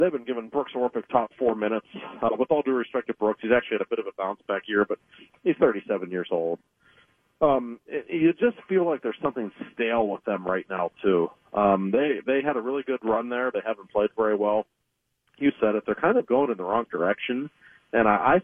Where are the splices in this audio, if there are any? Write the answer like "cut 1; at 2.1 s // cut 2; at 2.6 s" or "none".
cut 1; at 13.5 s // cut 2; at 15.8 s